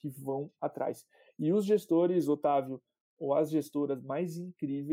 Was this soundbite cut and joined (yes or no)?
no